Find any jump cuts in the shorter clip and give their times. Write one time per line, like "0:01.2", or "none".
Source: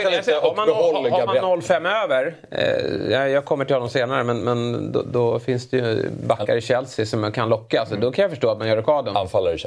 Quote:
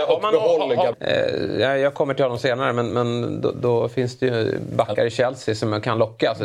0:00.9